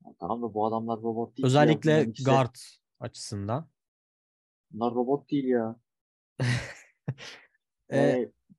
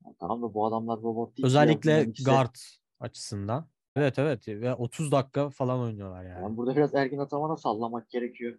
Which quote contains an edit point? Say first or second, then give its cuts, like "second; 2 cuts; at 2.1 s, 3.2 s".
second; 1 cut; at 4.0 s